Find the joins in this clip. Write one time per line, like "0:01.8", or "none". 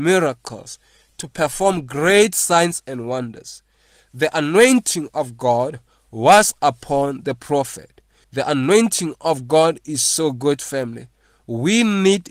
0:08.2

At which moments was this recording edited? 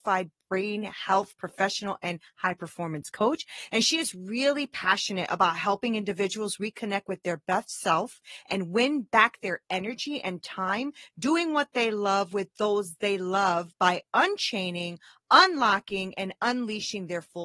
none

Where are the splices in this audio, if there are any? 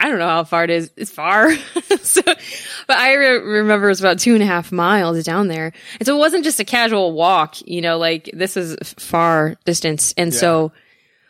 none

